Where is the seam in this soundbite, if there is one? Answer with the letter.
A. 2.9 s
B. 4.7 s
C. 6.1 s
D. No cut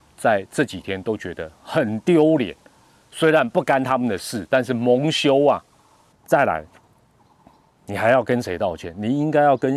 C